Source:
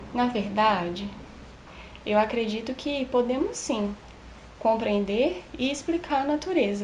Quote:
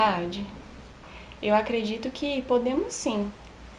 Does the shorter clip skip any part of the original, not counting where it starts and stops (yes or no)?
no